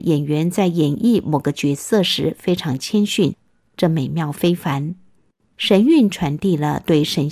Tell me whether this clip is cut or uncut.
uncut